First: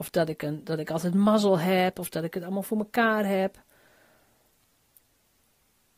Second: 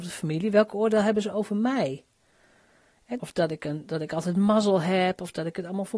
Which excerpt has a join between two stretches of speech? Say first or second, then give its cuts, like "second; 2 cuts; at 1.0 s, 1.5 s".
second; 1 cut; at 3.2 s